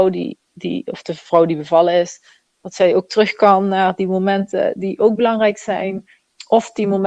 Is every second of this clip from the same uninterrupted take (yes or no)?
yes